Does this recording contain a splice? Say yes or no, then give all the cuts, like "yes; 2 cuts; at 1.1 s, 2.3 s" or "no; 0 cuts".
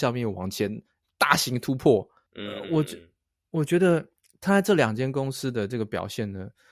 no; 0 cuts